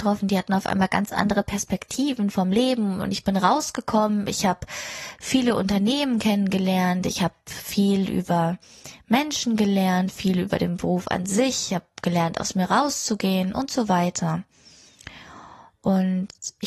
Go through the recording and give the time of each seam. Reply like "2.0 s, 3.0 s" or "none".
none